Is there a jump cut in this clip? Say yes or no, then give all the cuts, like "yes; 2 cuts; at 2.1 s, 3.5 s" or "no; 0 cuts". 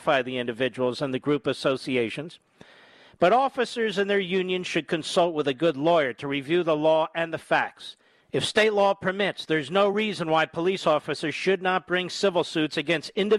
yes; 1 cut; at 8.2 s